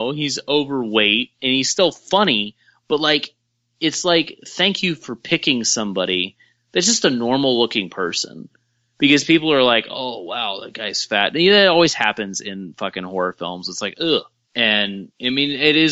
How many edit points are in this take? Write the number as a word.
one